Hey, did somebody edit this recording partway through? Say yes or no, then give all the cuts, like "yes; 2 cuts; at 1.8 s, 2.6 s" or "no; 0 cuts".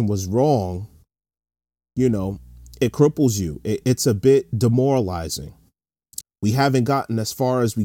yes; 2 cuts; at 3.8 s, 6.2 s